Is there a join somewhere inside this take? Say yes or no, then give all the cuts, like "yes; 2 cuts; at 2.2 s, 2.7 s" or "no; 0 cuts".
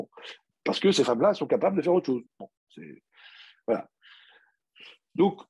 no; 0 cuts